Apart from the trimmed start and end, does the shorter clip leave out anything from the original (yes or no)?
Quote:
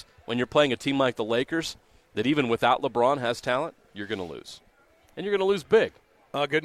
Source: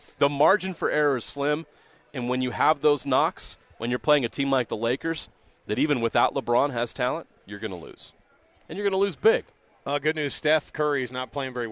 no